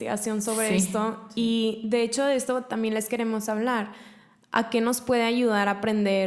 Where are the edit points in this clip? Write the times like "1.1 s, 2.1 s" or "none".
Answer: none